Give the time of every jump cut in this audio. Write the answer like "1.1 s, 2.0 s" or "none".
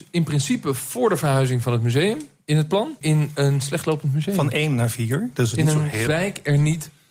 3.0 s, 6.1 s